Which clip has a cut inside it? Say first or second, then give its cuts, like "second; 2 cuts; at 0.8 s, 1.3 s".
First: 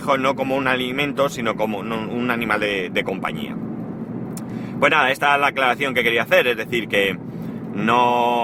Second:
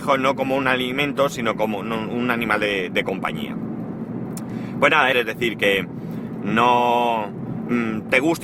second; 1 cut; at 5.1 s